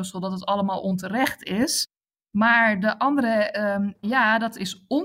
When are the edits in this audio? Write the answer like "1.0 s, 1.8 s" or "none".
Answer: 4.0 s